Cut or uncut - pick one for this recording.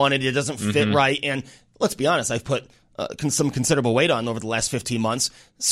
uncut